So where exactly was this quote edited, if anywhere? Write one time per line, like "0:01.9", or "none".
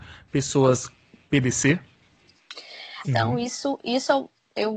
0:03.0